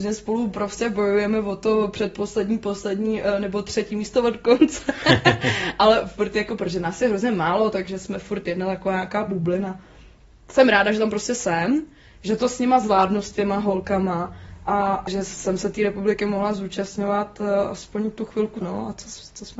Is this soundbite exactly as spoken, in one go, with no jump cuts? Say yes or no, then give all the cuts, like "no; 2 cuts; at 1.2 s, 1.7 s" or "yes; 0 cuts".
no; 2 cuts; at 15.1 s, 18.6 s